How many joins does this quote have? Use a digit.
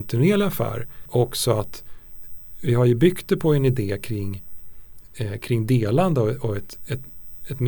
0